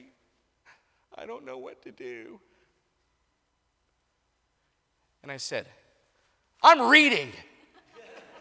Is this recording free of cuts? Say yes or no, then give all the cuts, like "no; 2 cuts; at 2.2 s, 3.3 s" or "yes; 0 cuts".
yes; 0 cuts